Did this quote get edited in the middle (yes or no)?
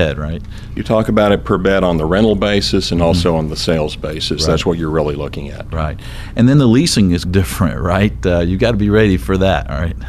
yes